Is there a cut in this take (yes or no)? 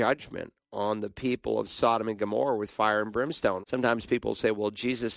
yes